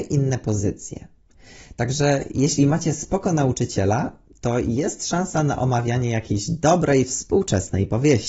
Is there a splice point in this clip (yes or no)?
no